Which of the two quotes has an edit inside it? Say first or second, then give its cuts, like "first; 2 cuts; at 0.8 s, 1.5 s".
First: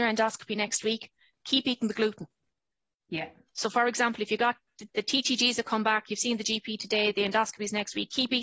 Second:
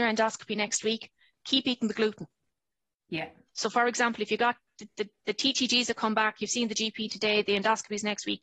first; 1 cut; at 4.9 s